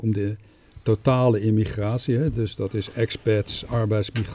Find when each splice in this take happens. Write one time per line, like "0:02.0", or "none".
none